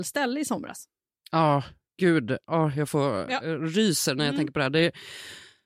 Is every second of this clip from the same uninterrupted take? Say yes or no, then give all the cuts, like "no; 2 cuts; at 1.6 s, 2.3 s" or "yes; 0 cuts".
yes; 0 cuts